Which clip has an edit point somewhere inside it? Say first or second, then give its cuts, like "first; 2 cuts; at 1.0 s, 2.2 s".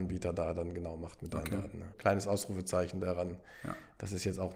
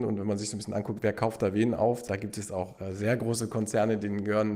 first; 1 cut; at 1.9 s